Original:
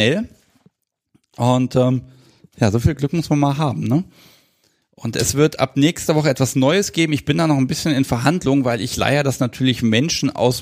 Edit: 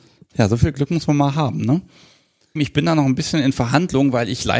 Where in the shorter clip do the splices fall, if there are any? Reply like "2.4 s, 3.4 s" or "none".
2.6 s